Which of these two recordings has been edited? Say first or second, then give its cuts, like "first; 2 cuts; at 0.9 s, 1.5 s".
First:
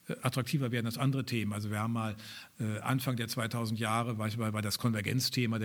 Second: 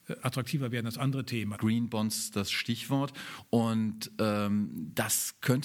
second; 1 cut; at 1.5 s